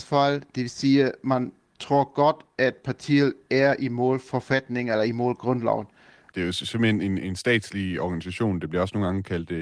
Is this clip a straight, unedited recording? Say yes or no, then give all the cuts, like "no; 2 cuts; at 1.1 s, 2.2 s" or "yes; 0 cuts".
no; 1 cut; at 6.3 s